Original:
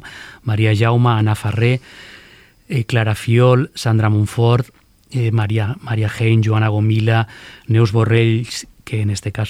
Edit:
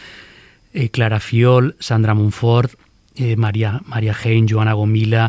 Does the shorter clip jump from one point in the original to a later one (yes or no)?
no